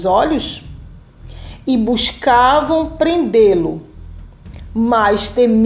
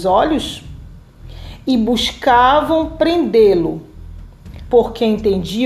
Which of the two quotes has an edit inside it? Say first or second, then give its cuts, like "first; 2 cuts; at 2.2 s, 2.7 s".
second; 1 cut; at 4.7 s